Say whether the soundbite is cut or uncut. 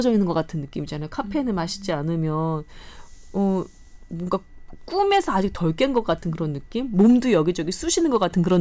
uncut